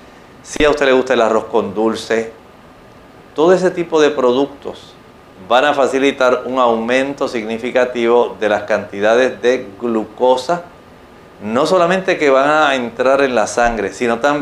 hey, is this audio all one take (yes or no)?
yes